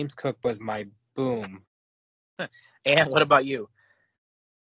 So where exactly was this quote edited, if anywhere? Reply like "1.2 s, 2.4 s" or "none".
1.7 s